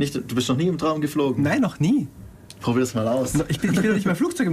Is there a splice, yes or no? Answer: no